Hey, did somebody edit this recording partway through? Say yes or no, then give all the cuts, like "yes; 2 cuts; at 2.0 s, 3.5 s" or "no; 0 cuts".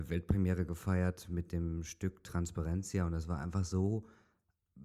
no; 0 cuts